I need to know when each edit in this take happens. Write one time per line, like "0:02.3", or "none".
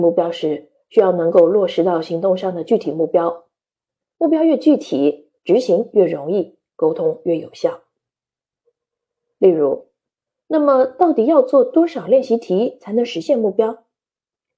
0:10.4